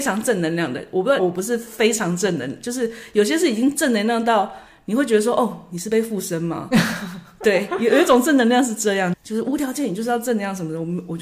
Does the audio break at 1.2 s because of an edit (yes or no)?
yes